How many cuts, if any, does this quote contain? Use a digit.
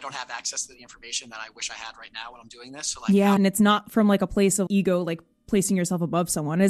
2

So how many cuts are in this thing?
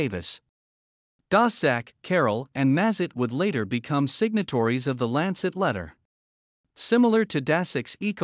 1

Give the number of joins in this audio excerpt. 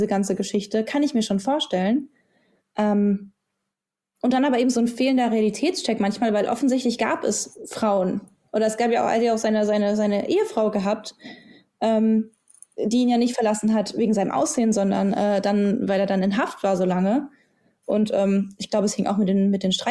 1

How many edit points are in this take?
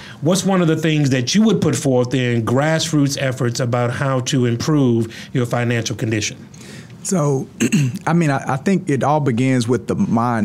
0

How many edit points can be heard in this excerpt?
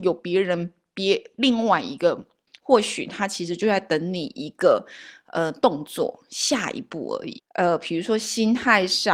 2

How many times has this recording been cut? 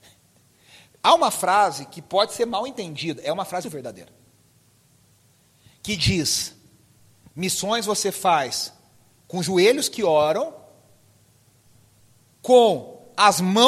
1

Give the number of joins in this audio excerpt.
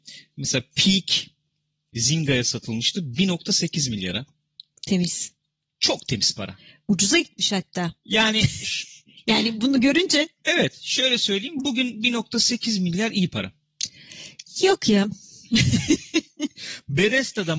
0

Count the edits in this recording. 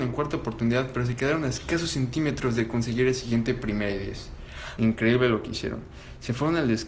1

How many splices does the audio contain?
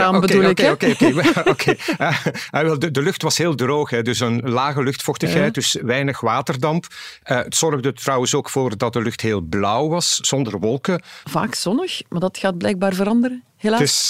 1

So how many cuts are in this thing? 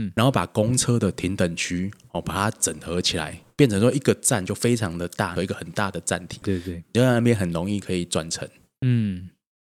2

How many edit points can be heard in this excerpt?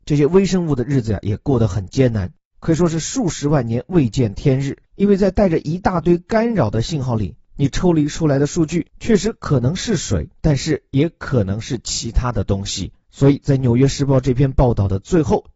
2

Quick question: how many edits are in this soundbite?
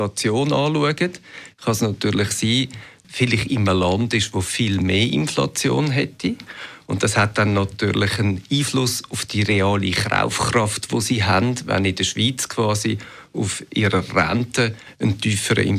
1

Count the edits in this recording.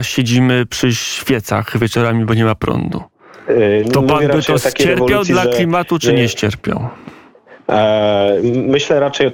0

